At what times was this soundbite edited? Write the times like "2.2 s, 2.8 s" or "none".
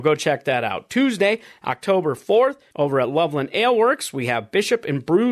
2.7 s

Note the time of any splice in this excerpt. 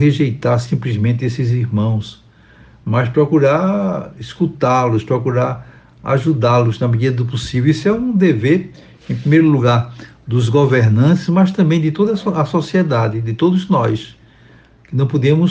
none

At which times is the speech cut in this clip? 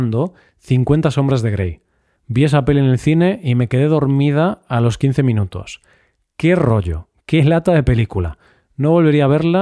2.2 s

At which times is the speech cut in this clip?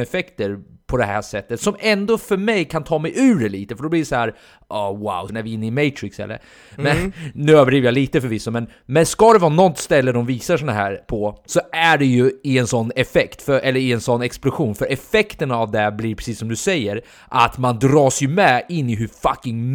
5.3 s

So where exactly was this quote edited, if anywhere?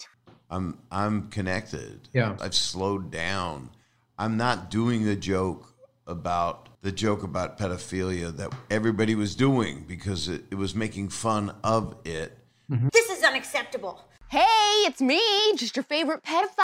2.4 s, 6.7 s, 12.9 s

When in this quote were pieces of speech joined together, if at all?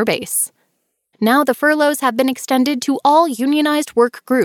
1.1 s

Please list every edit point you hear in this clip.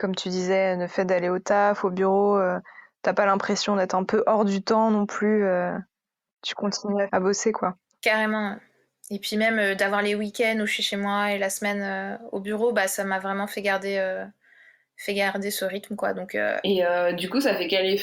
7.1 s

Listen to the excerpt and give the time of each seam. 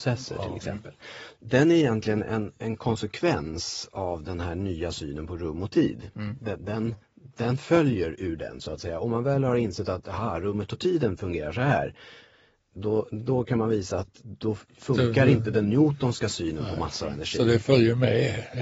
1.3 s

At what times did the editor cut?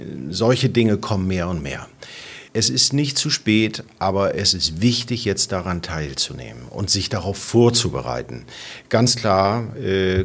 2.5 s

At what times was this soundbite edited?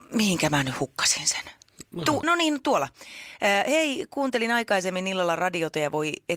2.2 s

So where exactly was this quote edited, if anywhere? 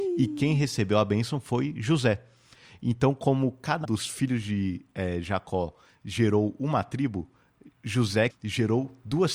3.8 s, 8.3 s

